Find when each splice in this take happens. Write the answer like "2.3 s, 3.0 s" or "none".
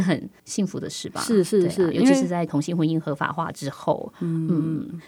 none